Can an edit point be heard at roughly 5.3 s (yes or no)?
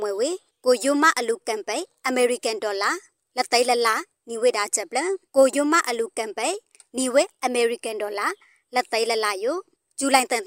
yes